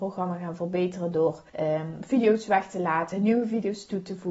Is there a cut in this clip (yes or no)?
yes